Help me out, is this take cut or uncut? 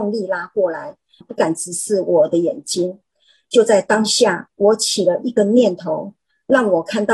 cut